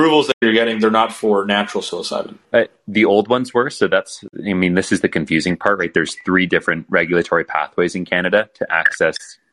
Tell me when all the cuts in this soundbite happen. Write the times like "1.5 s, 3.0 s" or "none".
2.4 s